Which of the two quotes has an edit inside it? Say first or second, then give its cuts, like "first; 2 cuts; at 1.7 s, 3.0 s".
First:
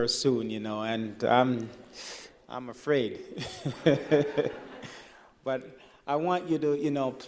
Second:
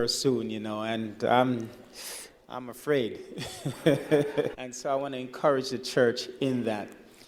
second; 1 cut; at 4.5 s